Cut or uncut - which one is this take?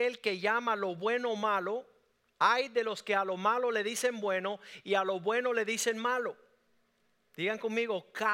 uncut